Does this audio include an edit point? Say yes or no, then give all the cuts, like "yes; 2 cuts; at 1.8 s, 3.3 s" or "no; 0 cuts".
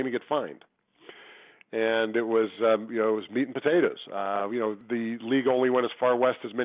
no; 0 cuts